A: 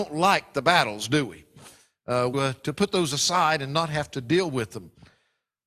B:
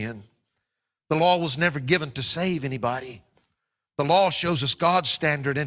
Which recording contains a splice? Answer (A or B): A